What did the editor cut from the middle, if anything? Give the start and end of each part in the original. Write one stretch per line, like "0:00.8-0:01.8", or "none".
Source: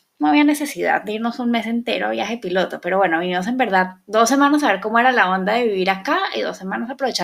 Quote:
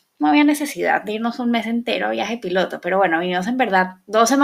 none